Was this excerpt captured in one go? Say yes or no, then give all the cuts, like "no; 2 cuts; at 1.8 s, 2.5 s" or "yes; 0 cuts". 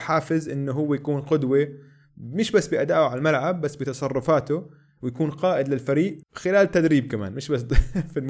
no; 1 cut; at 6.2 s